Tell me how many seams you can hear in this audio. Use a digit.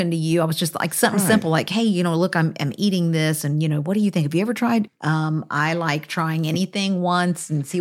1